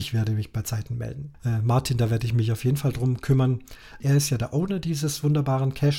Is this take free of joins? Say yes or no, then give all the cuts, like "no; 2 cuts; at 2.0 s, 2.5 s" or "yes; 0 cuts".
no; 2 cuts; at 1.3 s, 4.0 s